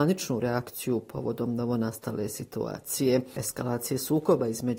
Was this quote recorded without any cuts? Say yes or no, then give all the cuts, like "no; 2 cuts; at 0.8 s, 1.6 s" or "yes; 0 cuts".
yes; 0 cuts